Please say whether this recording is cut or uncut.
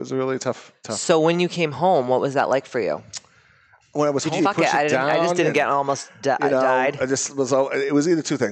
cut